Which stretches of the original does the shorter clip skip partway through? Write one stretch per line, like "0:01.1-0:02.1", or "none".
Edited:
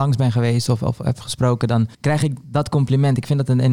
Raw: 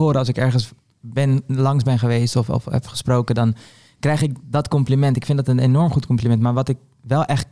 0:03.6-0:03.9

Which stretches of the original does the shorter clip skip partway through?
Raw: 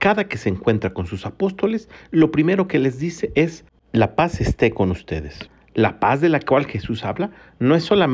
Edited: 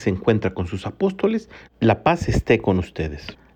0:02.1-0:03.8

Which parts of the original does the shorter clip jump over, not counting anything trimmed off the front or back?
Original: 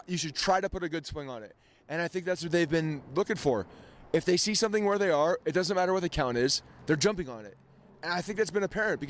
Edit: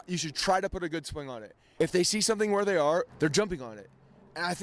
0:01.8-0:04.1
0:05.4-0:06.8

